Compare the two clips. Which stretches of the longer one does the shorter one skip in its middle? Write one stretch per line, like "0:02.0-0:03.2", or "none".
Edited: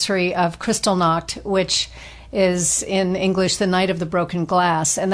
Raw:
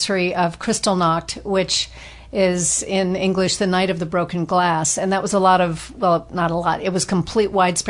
none